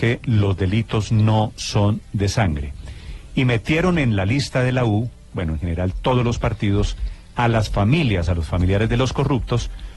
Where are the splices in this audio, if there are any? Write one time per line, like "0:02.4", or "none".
none